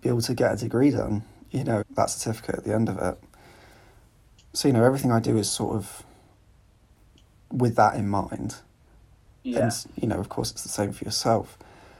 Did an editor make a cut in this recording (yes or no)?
yes